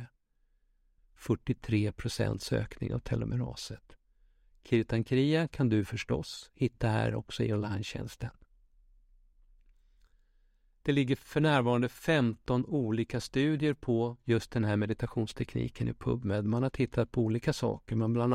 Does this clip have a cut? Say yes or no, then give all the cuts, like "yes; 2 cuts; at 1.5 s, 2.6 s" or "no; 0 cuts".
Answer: yes; 1 cut; at 1.0 s